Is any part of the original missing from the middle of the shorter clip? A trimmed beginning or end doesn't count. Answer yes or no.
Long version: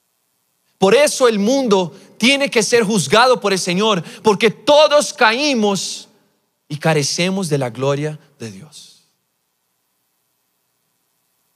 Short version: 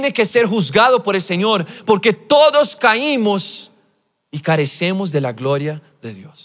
no